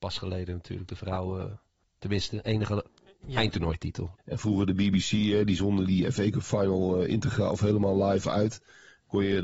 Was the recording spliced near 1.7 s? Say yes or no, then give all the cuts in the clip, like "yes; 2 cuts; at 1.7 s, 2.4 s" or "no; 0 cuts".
no; 2 cuts; at 4.1 s, 5.9 s